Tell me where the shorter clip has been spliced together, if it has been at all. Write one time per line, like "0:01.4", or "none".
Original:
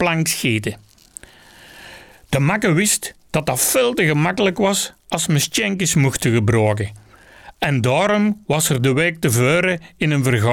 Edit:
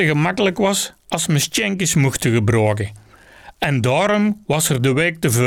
none